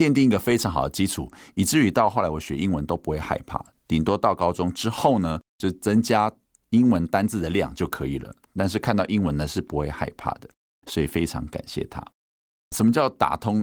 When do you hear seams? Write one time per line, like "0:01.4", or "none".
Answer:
0:12.7